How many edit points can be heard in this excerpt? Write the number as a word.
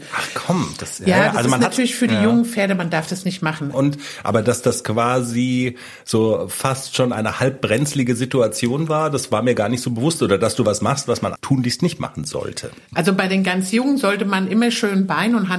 two